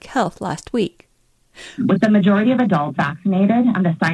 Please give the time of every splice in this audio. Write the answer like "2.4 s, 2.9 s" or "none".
1.8 s, 3.0 s